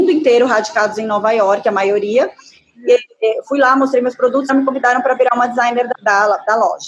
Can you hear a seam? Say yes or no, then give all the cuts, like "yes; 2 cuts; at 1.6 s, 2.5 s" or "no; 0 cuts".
yes; 2 cuts; at 4.5 s, 5.9 s